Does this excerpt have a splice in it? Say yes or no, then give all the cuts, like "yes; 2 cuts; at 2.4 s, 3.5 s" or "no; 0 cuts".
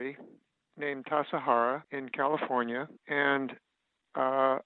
yes; 2 cuts; at 1.8 s, 3.0 s